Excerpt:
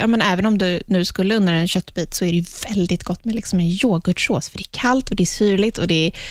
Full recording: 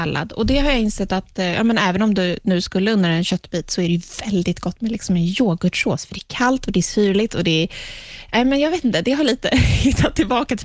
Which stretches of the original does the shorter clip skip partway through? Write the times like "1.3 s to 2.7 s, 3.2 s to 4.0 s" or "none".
none